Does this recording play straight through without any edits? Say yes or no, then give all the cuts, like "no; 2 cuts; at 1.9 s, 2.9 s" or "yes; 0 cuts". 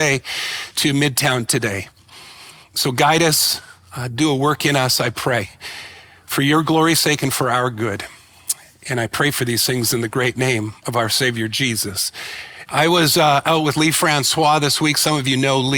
no; 2 cuts; at 10.8 s, 12.7 s